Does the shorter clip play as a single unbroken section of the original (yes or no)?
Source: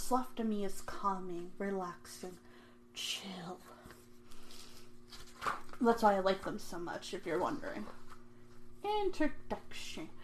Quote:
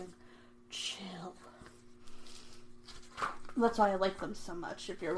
yes